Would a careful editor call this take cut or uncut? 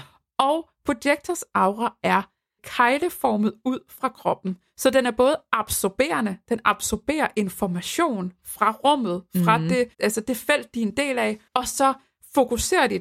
cut